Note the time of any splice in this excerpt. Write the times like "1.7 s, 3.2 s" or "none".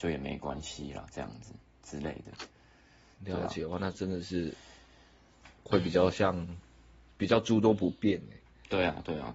none